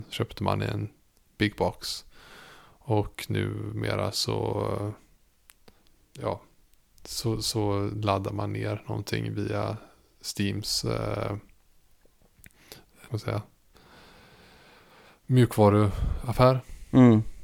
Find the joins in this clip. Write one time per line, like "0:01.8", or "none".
0:13.1